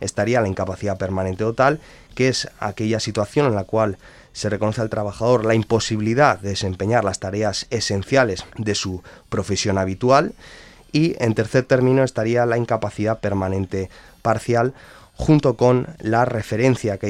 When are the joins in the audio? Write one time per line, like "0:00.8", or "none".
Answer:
0:08.5